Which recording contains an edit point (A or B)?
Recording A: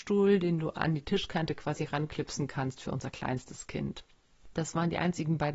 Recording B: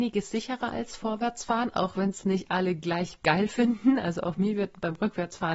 A